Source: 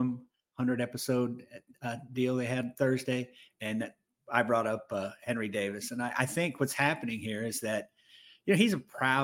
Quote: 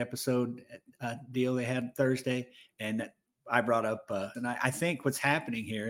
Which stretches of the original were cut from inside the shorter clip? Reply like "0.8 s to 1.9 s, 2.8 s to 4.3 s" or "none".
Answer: 5.2 s to 5.9 s